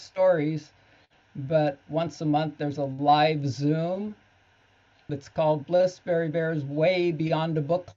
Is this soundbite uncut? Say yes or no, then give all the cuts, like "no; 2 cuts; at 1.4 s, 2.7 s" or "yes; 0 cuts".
no; 1 cut; at 5.1 s